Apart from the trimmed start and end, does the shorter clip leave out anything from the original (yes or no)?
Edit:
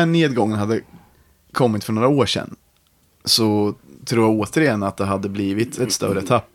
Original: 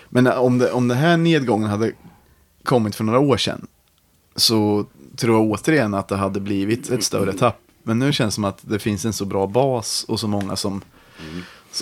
no